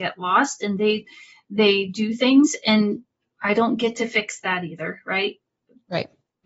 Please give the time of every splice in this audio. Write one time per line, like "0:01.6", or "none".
none